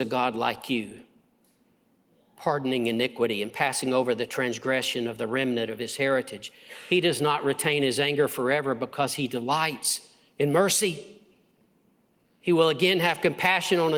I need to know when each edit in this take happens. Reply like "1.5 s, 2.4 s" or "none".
none